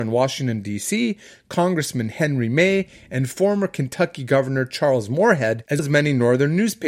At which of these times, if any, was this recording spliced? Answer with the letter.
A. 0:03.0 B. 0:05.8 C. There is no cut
B